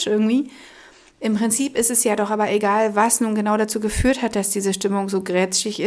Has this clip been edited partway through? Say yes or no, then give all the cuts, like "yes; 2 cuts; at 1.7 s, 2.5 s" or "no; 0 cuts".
yes; 1 cut; at 1.1 s